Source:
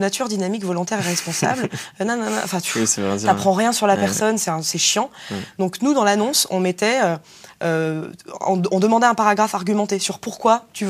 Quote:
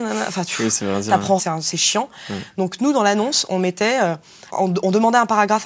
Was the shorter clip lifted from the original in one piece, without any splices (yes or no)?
no